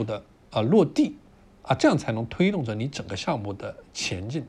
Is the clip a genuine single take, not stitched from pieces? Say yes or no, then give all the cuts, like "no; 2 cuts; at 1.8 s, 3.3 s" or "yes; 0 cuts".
yes; 0 cuts